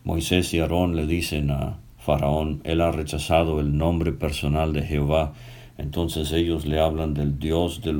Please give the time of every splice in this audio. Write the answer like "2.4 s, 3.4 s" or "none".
none